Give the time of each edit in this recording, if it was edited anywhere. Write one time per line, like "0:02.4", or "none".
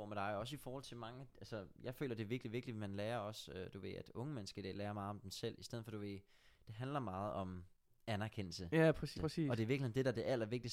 0:09.2